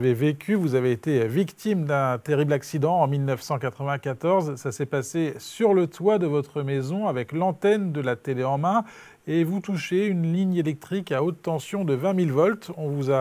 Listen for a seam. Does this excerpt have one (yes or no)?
no